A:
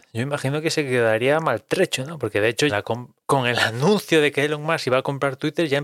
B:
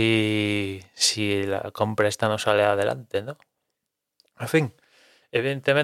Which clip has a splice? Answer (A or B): A